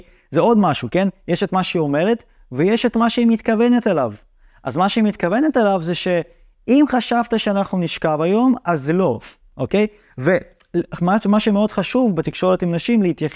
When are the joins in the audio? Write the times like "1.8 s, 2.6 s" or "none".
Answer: none

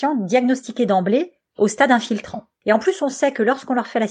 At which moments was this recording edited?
2.6 s

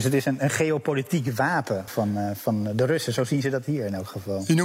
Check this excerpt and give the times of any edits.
1.9 s

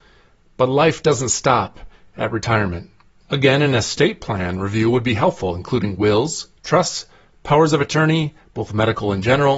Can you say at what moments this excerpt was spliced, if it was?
3.2 s

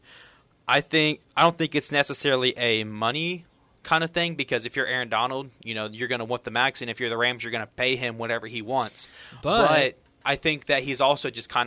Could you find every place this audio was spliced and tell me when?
none

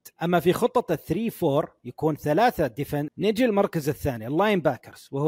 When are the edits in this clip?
3.1 s

